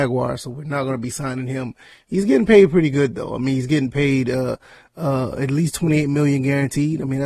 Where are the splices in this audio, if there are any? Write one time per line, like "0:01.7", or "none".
none